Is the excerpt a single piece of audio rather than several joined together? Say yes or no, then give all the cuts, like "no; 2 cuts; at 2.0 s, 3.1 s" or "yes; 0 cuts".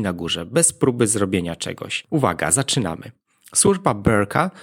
no; 1 cut; at 2.1 s